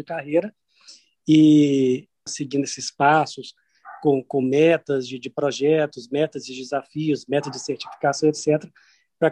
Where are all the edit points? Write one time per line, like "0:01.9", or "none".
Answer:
0:02.3